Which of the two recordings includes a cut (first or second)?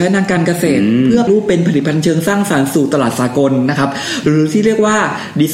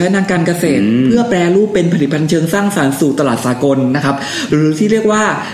first